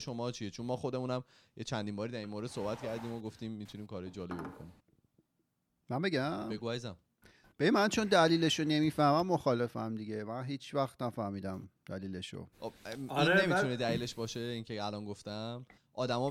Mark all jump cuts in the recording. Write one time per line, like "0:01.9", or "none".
0:12.5